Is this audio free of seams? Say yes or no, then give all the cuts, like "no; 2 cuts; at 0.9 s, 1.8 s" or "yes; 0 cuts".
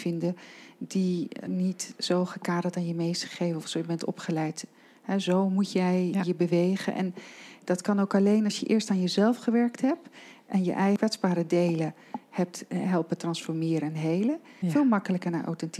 no; 2 cuts; at 1.5 s, 14.6 s